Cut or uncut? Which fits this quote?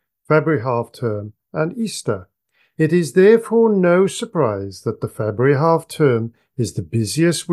uncut